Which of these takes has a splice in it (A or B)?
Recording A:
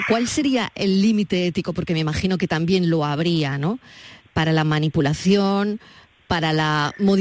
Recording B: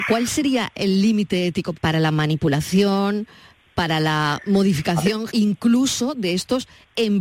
B